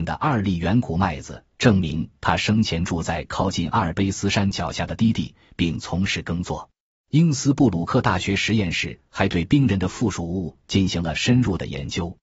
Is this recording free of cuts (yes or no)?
no